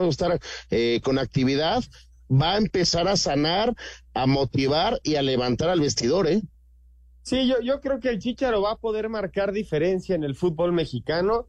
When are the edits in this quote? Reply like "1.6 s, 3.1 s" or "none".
none